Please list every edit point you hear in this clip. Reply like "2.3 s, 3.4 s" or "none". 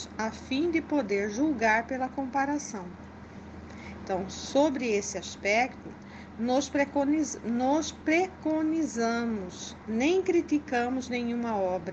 none